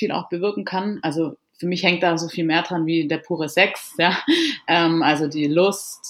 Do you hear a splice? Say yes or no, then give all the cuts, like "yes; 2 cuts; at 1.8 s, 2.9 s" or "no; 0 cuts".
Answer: no; 0 cuts